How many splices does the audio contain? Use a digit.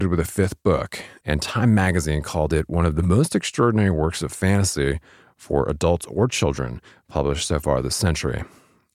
1